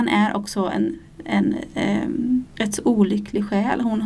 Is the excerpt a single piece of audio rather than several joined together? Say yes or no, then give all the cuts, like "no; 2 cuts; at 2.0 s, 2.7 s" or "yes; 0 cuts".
yes; 0 cuts